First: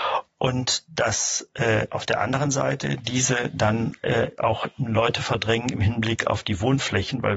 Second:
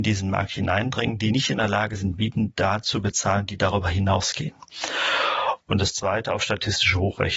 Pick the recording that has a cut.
second; 1 cut; at 5.7 s

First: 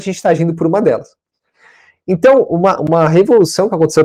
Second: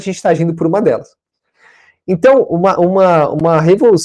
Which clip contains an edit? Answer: first; 1 cut; at 2.8 s

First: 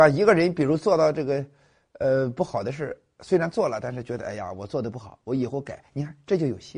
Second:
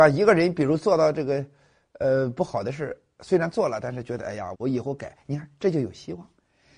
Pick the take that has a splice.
second; 1 cut; at 4.5 s

